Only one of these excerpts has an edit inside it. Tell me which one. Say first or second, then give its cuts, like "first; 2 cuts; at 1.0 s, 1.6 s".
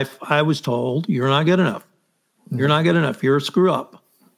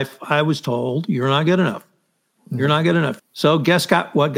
second; 1 cut; at 3.2 s